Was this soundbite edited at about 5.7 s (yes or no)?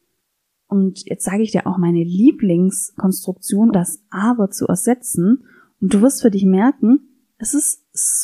no